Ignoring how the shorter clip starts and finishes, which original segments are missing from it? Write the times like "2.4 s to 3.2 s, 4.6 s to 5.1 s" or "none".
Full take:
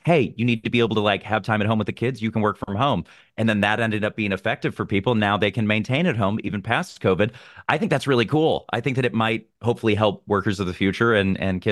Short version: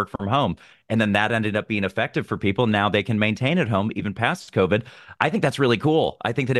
none